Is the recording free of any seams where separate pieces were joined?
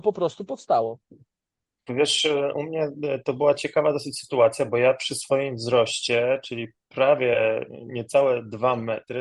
no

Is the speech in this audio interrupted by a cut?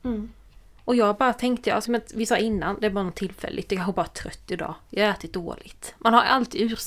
yes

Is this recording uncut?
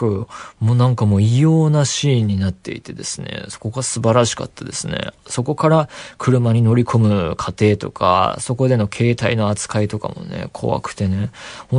yes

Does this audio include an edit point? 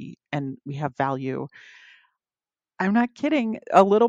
no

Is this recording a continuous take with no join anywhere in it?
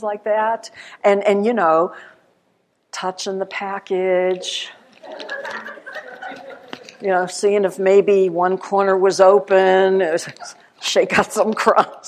yes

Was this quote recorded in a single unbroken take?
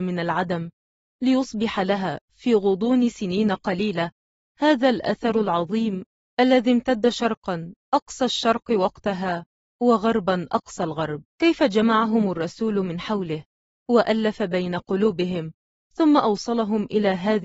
no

